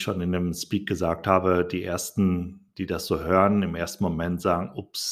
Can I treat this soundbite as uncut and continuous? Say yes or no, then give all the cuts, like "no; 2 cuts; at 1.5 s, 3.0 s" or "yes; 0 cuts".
yes; 0 cuts